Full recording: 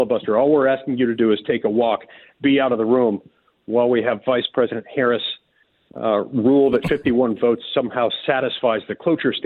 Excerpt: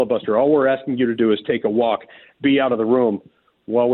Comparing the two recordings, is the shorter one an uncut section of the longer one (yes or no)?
yes